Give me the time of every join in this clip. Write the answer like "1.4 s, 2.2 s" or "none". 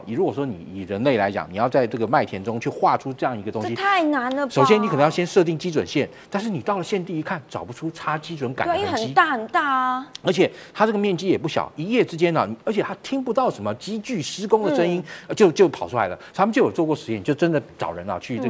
none